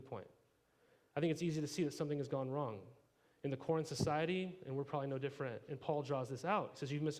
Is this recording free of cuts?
yes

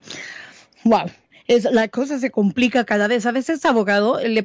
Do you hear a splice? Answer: no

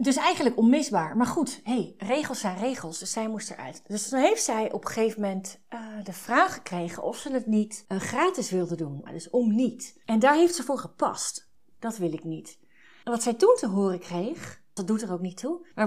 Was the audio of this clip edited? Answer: yes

